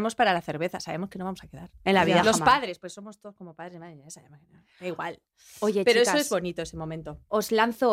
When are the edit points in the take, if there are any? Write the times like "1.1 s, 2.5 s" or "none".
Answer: none